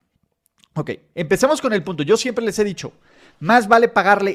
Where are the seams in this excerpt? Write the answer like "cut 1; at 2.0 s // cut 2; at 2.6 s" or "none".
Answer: cut 1; at 1.1 s